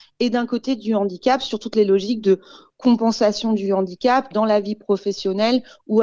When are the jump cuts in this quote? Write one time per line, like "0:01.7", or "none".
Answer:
none